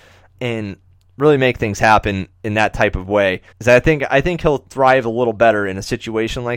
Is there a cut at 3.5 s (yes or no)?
yes